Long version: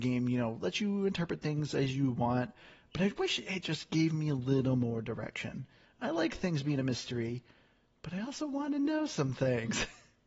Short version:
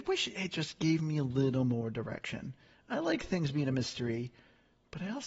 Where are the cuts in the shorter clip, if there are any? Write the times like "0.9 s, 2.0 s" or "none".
none